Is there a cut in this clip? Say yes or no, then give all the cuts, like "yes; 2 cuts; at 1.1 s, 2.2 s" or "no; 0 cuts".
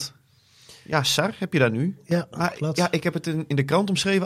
no; 0 cuts